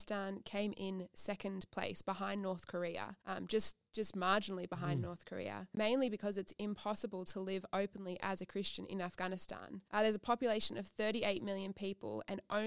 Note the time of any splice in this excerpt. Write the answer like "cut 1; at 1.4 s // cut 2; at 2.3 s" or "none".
none

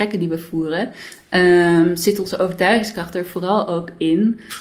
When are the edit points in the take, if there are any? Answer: none

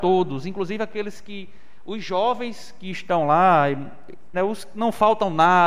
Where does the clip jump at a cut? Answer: cut 1; at 4.3 s

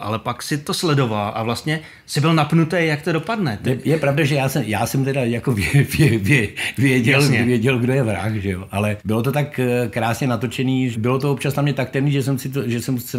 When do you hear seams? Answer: cut 1; at 9.0 s // cut 2; at 10.9 s

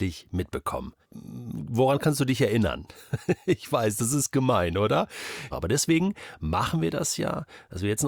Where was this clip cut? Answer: cut 1; at 1.0 s // cut 2; at 5.5 s

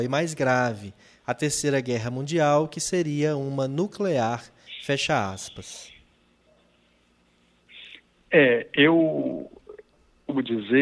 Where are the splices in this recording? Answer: none

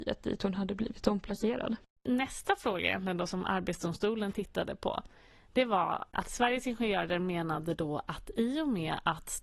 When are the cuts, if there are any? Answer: cut 1; at 2.0 s

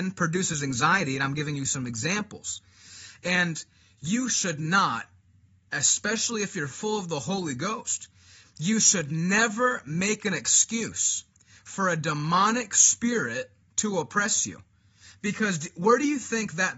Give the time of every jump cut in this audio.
none

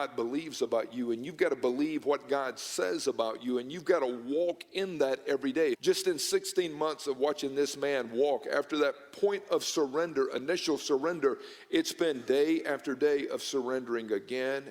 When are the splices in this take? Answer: cut 1; at 5.7 s

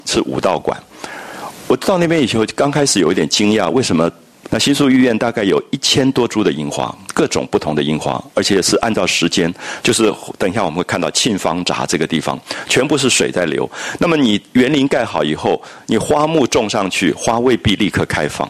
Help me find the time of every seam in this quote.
cut 1; at 4.5 s // cut 2; at 9.8 s

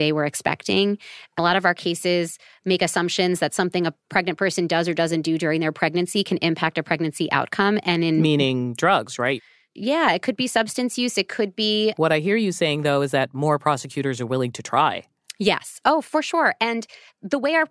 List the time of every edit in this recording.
cut 1; at 11.9 s

